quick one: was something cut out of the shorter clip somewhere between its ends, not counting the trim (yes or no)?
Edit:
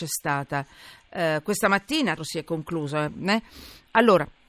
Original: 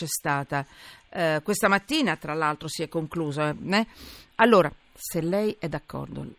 yes